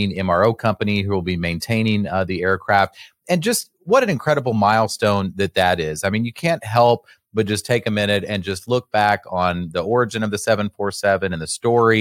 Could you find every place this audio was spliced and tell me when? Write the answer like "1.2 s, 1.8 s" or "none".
none